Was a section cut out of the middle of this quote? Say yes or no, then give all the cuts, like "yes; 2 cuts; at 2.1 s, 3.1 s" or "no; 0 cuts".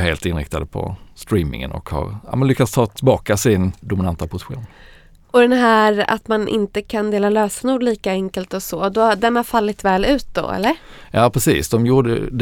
yes; 1 cut; at 3.8 s